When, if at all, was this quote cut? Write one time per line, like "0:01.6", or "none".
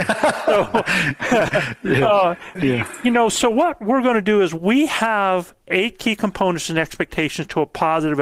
0:02.6